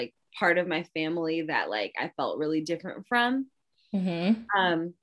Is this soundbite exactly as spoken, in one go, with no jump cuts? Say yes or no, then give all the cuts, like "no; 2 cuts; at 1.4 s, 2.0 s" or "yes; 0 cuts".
yes; 0 cuts